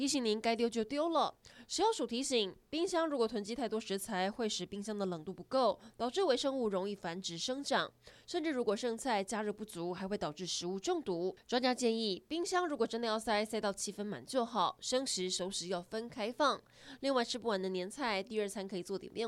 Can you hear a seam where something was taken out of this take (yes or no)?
no